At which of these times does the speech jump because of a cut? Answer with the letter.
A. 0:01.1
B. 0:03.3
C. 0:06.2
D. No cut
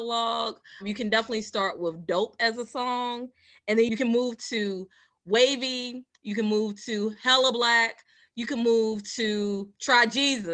D